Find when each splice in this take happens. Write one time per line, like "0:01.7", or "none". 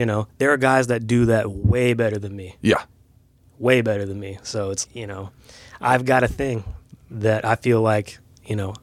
0:04.8